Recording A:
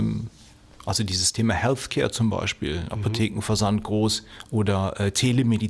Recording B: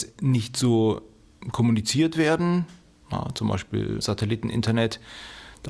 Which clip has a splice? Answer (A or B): B